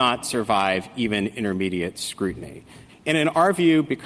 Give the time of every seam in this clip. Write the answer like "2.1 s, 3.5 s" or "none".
2.9 s